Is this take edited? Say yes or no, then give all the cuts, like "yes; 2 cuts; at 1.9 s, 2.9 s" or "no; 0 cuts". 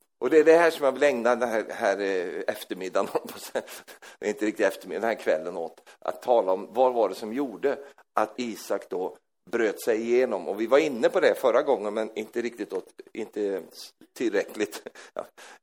yes; 1 cut; at 8.4 s